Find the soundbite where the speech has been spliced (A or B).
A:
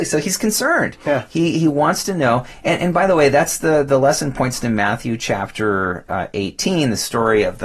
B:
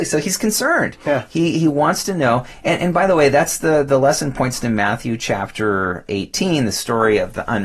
B